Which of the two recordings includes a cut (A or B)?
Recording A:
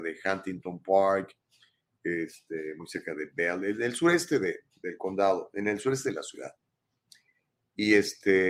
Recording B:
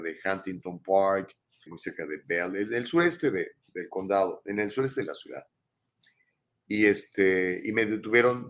B